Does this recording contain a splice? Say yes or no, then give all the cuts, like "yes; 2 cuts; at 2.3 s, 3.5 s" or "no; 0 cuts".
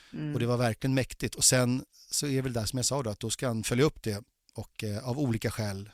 no; 0 cuts